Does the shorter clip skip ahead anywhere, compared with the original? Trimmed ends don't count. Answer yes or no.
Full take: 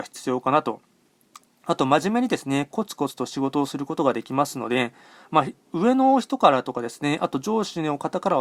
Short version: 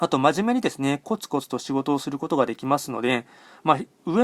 no